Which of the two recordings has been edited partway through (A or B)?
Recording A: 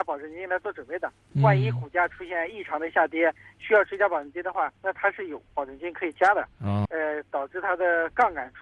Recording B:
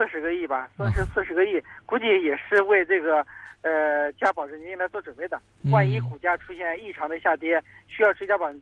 A